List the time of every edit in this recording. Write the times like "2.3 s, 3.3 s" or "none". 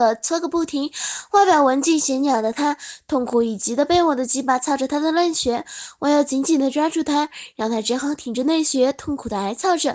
none